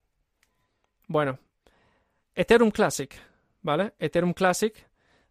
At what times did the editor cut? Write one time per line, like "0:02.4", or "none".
none